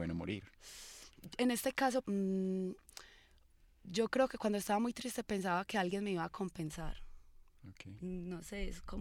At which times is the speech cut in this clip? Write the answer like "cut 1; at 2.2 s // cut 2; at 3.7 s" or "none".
cut 1; at 2.0 s